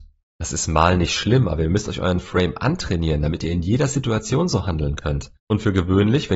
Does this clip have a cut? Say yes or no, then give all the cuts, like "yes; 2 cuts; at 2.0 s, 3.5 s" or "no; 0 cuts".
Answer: yes; 1 cut; at 5.4 s